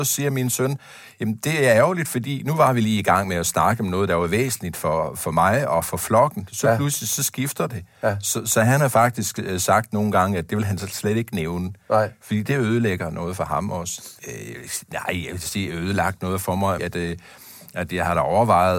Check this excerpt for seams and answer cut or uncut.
cut